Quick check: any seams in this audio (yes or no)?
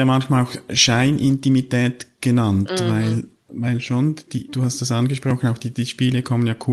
yes